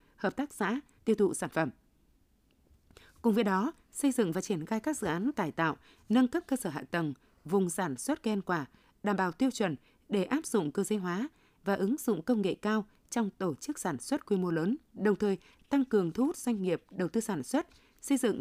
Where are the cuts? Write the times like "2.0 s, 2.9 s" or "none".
1.0 s, 14.8 s